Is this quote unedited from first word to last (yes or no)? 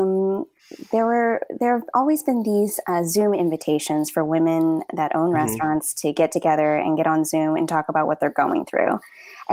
yes